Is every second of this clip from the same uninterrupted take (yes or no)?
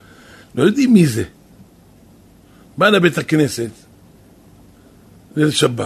yes